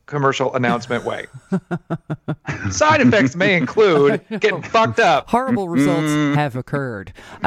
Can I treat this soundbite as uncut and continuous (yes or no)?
yes